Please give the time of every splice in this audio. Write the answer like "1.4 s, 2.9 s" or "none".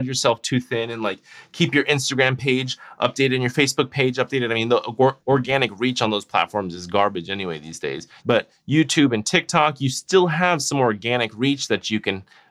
8.2 s